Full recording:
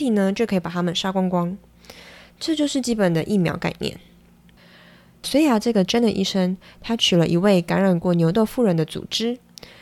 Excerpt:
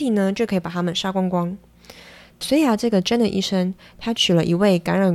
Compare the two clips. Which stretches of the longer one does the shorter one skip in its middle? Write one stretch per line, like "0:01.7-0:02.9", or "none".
0:02.3-0:05.1